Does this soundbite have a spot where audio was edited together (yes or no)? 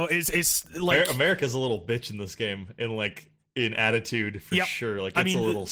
no